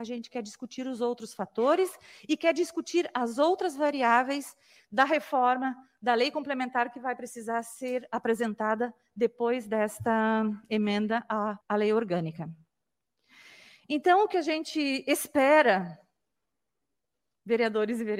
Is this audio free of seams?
no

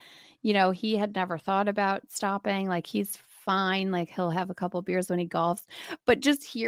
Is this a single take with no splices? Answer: yes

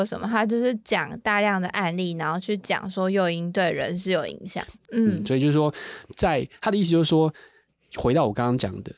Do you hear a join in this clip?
yes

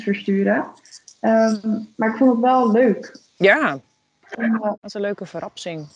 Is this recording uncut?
no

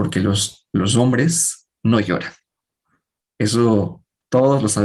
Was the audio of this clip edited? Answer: no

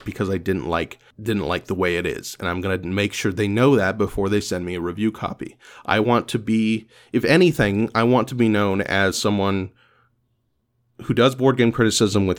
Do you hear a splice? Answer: no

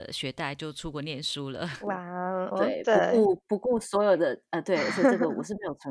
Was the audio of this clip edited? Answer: yes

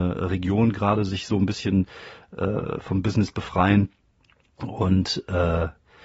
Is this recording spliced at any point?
no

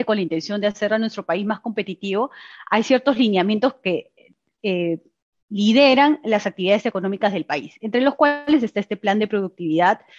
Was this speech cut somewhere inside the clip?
no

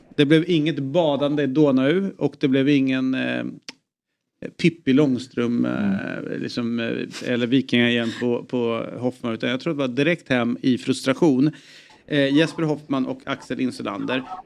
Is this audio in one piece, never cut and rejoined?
no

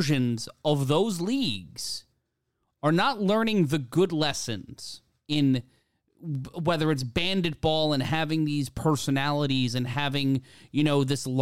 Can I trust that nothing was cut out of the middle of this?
yes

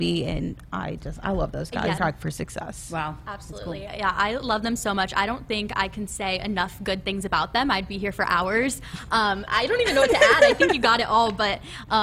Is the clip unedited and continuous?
no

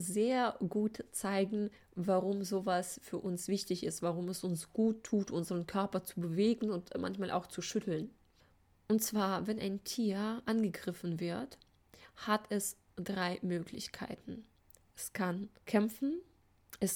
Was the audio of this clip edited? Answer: no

